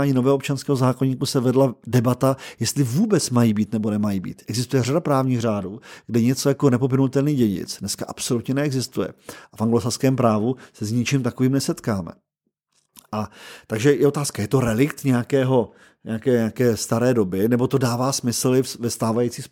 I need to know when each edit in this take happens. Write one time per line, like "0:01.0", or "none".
none